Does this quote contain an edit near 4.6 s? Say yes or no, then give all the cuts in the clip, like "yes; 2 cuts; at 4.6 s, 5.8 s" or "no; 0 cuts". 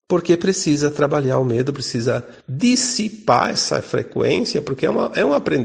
no; 1 cut; at 1.8 s